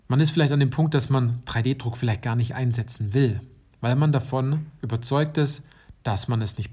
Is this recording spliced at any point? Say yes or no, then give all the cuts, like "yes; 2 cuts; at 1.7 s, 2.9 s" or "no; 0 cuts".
yes; 1 cut; at 4.8 s